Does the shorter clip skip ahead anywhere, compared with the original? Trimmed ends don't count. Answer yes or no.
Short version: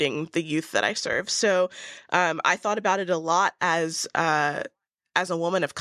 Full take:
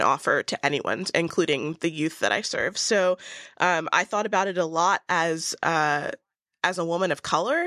no